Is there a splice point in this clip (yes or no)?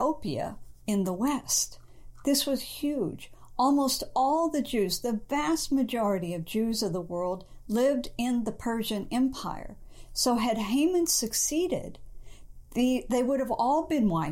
no